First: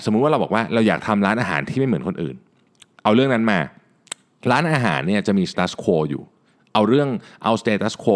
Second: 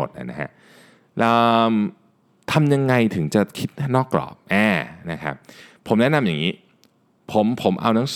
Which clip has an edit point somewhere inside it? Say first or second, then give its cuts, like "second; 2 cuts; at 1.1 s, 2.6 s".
first; 1 cut; at 5.5 s